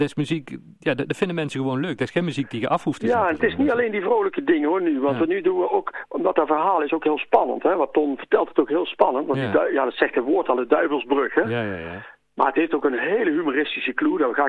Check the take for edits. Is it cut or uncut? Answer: uncut